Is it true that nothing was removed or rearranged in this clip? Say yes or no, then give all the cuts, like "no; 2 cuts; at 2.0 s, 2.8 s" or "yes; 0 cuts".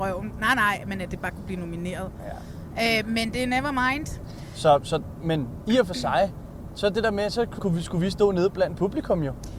no; 1 cut; at 7.6 s